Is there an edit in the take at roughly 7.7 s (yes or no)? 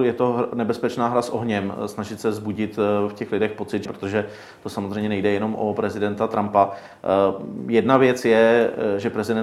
no